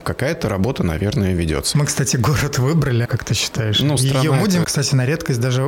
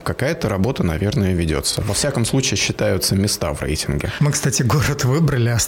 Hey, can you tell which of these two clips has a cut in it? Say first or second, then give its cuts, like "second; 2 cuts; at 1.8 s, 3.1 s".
first; 3 cuts; at 1.7 s, 3.0 s, 4.6 s